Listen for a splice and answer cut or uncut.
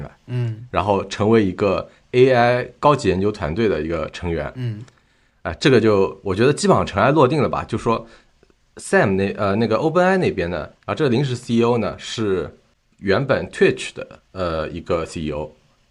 cut